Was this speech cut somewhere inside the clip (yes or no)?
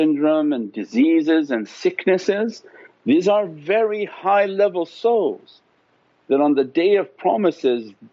no